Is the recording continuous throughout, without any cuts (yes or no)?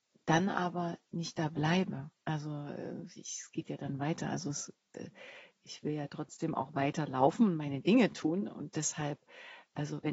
yes